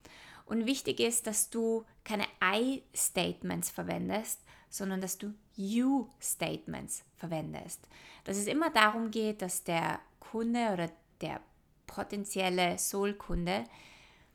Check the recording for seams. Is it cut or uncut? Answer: uncut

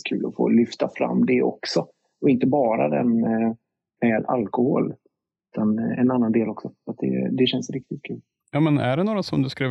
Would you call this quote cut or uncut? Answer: cut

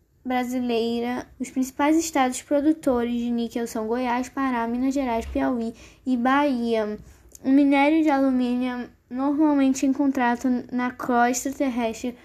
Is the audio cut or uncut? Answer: cut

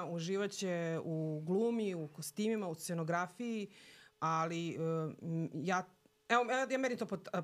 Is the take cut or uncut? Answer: uncut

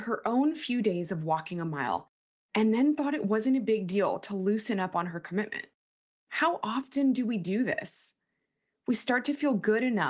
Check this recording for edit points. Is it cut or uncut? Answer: uncut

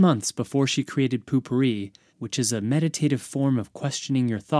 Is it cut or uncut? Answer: cut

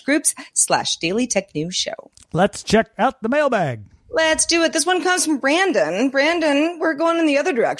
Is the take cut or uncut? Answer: uncut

